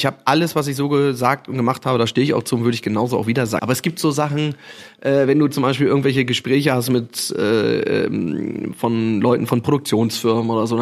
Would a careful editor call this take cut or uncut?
cut